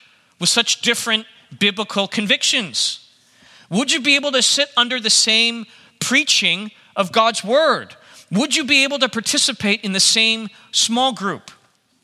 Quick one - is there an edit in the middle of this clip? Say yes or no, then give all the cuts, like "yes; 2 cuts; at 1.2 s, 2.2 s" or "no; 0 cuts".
no; 0 cuts